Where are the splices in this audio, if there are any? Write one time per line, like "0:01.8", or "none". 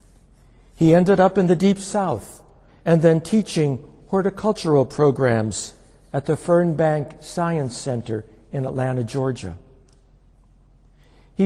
0:02.7

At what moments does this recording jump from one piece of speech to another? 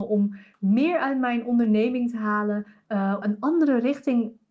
0:03.2

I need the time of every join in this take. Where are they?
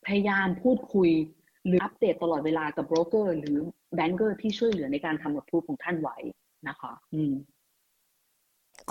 0:01.8
0:07.1

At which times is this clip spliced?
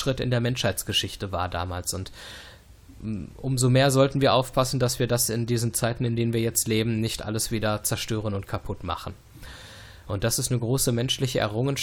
0:10.0

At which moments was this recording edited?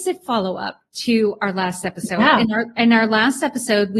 none

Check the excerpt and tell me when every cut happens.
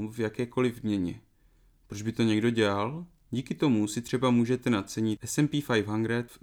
0:03.2

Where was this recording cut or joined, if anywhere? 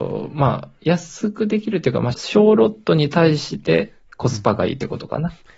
0:02.1

